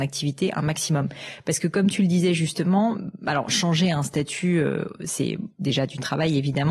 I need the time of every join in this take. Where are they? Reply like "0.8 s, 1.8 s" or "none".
none

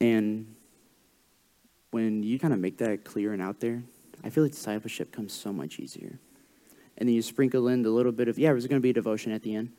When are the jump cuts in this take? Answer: 2.4 s, 6.8 s

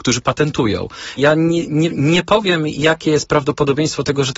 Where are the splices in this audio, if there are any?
1.2 s

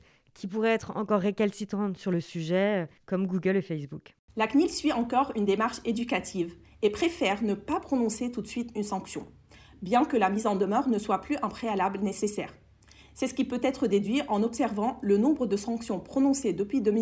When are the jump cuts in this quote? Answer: none

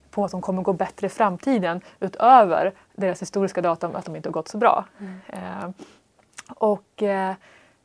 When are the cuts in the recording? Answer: none

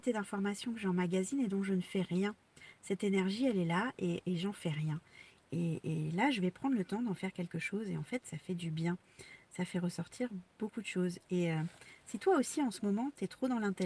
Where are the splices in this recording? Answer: none

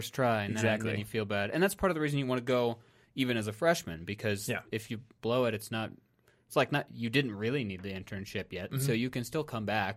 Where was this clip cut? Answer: none

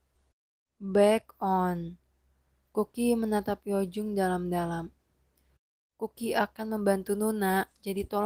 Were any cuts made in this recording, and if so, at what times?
none

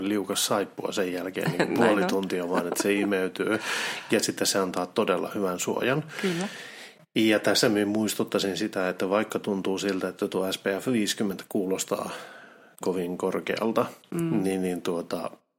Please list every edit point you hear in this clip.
12.8 s

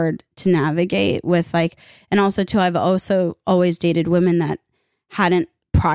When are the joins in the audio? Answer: none

